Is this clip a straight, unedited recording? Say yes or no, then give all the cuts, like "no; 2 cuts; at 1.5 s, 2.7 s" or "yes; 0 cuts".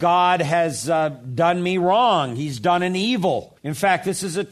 no; 1 cut; at 3.6 s